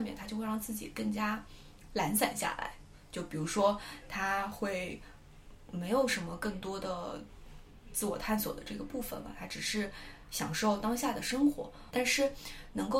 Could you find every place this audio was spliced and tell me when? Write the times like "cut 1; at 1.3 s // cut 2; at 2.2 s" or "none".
cut 1; at 11.9 s